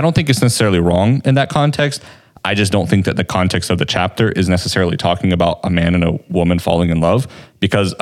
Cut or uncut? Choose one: uncut